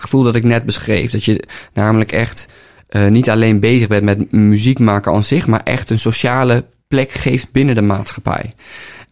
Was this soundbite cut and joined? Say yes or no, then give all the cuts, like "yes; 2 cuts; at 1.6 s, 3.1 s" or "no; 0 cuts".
no; 0 cuts